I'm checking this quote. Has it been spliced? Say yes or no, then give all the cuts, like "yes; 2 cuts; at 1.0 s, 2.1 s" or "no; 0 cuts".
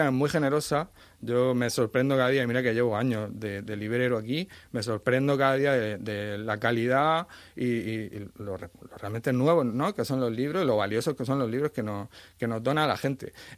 no; 0 cuts